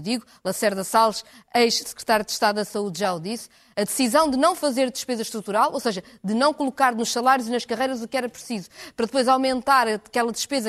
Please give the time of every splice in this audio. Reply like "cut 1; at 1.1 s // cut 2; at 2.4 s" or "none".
none